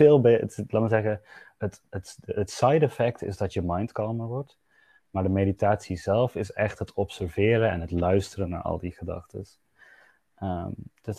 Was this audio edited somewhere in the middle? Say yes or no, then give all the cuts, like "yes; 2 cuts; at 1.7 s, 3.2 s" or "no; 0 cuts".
no; 0 cuts